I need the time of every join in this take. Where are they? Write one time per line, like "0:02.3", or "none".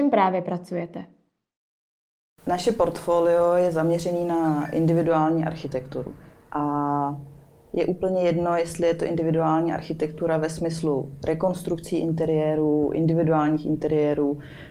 none